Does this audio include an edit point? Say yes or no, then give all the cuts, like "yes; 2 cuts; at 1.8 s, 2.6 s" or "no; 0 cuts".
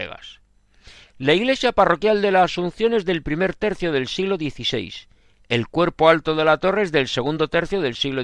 no; 0 cuts